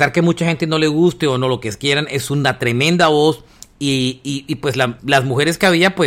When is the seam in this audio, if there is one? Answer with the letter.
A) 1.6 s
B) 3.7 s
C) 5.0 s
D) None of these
C